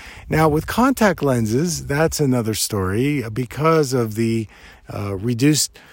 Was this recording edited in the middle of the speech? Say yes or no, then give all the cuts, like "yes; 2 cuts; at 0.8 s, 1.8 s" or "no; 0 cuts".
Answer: no; 0 cuts